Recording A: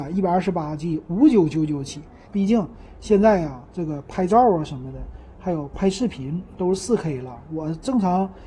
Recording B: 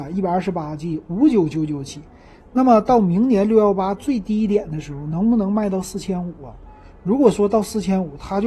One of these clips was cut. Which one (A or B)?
A